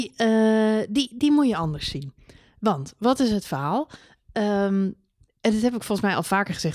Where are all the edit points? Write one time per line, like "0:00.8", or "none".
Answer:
none